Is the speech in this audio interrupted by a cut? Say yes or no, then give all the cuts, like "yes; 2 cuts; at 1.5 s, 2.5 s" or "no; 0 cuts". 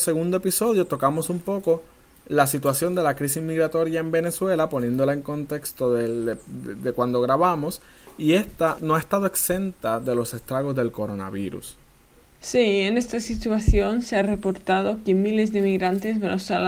no; 0 cuts